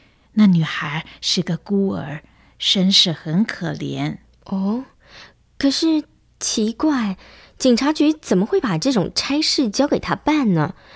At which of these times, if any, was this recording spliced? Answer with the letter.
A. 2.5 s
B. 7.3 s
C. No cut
C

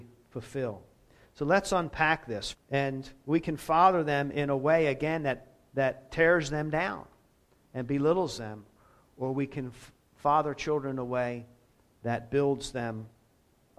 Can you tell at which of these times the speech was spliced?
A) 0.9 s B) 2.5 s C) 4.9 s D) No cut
B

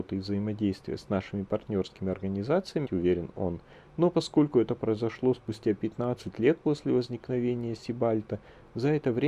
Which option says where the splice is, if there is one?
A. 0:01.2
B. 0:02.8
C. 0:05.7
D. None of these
B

